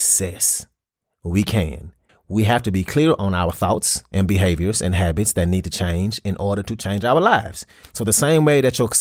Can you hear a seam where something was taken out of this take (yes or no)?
yes